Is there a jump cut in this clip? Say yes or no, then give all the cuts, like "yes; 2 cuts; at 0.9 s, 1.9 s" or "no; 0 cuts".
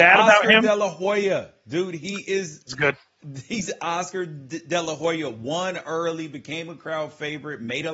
no; 0 cuts